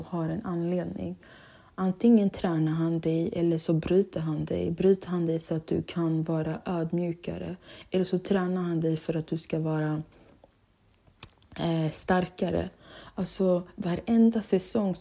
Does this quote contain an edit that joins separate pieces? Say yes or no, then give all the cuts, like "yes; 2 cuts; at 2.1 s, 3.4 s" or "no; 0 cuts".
no; 0 cuts